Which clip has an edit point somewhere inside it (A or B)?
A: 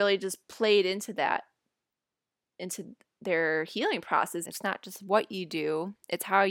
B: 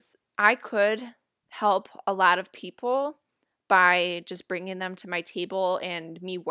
A